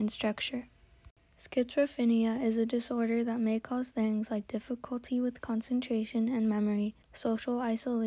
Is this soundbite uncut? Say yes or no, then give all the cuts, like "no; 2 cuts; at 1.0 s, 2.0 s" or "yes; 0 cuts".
no; 1 cut; at 7.0 s